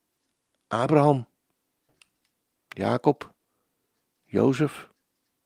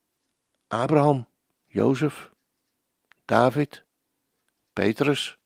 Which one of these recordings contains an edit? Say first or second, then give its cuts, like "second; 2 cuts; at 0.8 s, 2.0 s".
second; 1 cut; at 1.6 s